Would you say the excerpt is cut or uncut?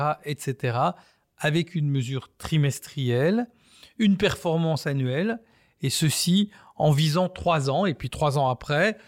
uncut